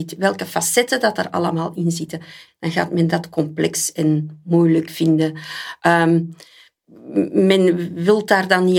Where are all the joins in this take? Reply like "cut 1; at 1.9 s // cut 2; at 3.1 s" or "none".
cut 1; at 2.5 s